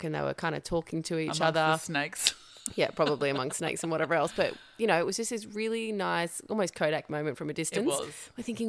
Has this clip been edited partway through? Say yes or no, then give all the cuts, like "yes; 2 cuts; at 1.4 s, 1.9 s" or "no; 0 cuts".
no; 0 cuts